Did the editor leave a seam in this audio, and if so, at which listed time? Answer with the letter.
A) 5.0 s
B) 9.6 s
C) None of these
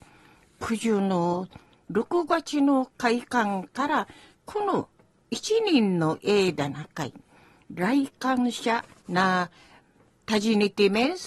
C